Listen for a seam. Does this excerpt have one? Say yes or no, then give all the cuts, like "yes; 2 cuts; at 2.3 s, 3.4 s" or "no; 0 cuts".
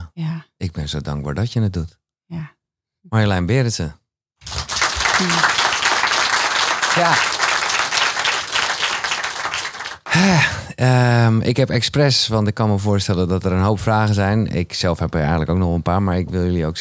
no; 0 cuts